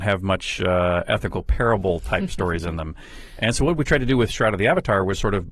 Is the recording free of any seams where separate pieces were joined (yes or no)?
yes